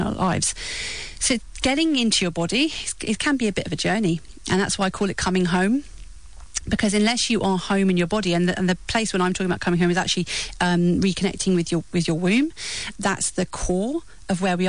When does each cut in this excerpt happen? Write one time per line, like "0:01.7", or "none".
0:12.9